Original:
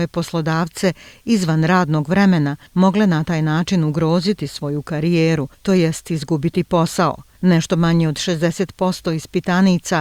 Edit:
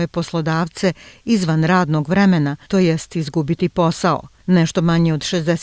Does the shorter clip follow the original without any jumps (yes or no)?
no